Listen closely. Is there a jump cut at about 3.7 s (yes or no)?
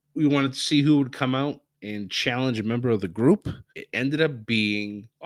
yes